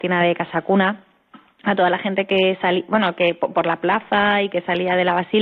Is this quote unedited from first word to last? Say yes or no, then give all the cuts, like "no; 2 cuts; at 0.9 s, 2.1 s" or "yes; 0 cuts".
yes; 0 cuts